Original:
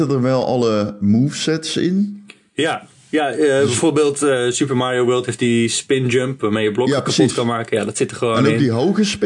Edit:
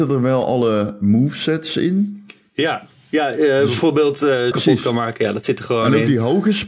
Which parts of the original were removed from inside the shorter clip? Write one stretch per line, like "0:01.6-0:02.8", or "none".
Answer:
0:04.5-0:07.0